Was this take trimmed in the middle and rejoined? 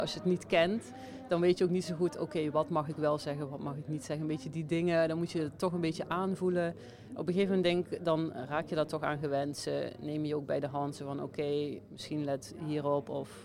no; 0 cuts

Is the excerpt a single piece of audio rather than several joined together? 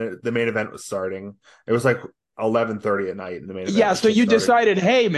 yes; 0 cuts

